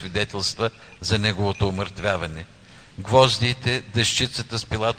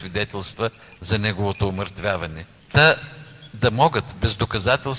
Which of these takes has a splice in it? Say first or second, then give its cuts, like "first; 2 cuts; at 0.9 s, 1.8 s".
second; 1 cut; at 2.6 s